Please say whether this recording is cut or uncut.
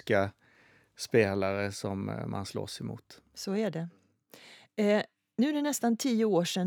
uncut